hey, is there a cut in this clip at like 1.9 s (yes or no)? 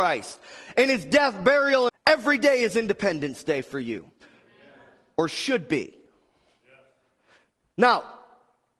yes